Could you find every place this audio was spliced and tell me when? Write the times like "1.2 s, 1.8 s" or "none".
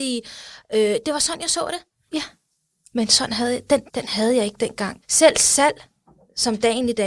2.1 s, 3.9 s, 5.0 s